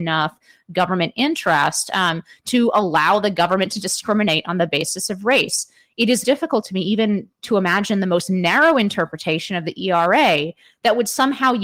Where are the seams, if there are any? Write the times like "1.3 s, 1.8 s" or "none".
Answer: 6.2 s